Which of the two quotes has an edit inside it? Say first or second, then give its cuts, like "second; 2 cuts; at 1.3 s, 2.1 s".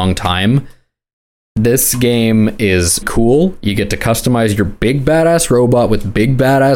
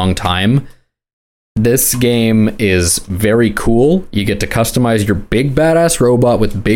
first; 1 cut; at 3.0 s